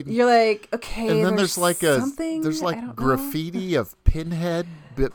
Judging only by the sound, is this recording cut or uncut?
uncut